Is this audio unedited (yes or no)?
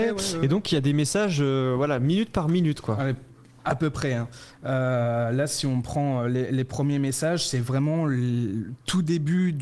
yes